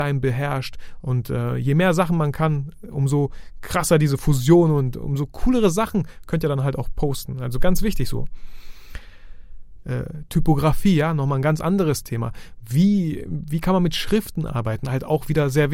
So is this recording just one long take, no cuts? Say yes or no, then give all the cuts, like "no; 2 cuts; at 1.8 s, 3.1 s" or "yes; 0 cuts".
no; 1 cut; at 9.8 s